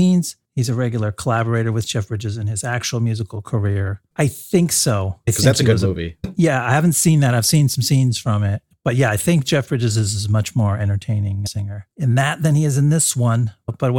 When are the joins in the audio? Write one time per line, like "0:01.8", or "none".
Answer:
0:04.1